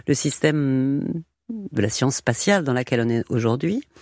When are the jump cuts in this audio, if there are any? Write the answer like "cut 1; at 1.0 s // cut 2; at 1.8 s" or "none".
none